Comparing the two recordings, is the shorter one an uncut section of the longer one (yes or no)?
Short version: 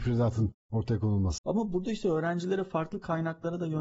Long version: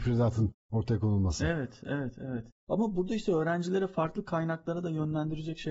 no